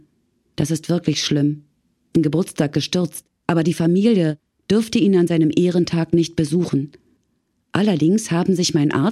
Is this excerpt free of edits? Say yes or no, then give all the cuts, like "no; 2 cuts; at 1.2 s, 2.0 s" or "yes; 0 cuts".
no; 2 cuts; at 2.1 s, 3.4 s